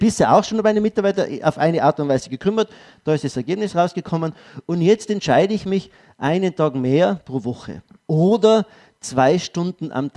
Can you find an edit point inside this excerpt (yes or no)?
no